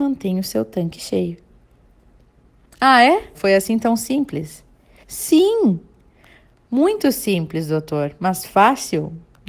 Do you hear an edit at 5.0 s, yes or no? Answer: yes